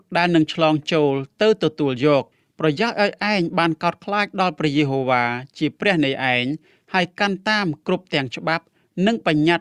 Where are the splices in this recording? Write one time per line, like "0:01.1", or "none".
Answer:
none